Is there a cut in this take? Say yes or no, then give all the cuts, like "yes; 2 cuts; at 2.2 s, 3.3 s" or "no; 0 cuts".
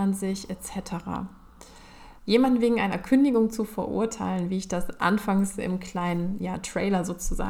yes; 1 cut; at 2.2 s